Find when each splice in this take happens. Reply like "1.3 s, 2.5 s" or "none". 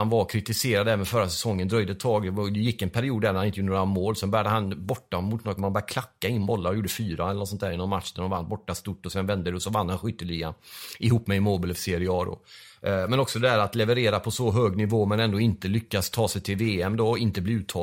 5.6 s